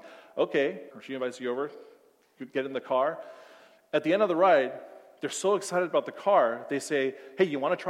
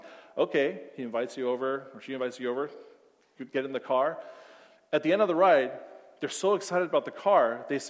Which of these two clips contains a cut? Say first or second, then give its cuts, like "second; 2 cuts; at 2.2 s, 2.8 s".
first; 1 cut; at 0.9 s